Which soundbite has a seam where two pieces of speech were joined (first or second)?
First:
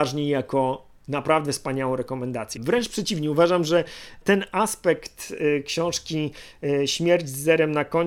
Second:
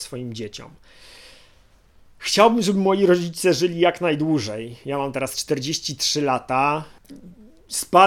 first